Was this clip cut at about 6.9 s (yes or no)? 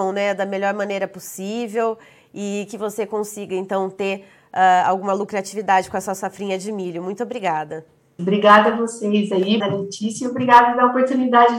no